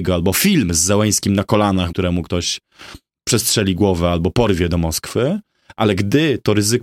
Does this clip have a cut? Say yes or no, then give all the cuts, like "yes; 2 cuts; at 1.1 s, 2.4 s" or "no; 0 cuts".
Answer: yes; 1 cut; at 1.9 s